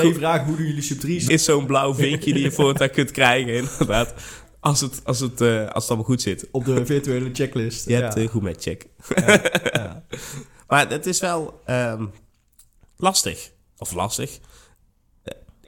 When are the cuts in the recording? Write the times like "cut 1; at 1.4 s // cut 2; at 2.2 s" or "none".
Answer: cut 1; at 1.3 s